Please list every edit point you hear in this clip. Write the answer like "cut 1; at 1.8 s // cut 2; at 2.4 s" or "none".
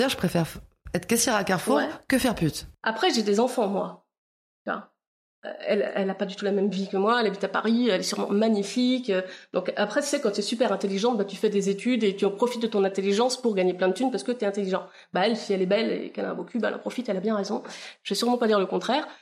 none